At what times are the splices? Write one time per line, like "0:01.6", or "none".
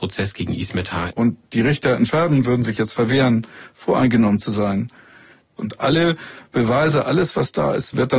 0:01.1
0:05.6